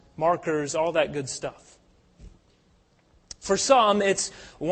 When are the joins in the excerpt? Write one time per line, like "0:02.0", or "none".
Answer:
none